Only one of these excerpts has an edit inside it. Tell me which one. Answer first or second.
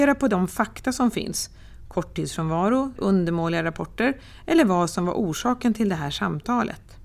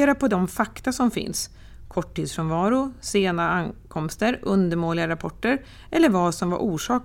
first